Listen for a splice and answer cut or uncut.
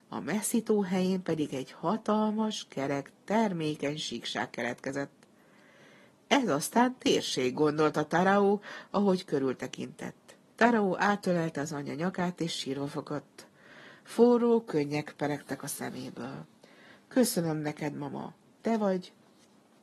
cut